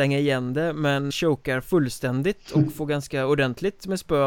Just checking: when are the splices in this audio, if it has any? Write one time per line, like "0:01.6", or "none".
0:01.1